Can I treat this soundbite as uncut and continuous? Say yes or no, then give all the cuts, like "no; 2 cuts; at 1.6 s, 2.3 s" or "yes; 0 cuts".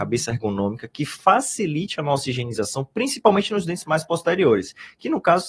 yes; 0 cuts